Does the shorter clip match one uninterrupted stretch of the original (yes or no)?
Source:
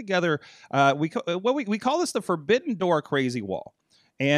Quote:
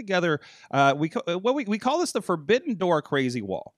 yes